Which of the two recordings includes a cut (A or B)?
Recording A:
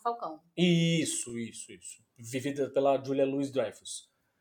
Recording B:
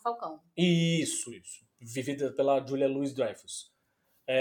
B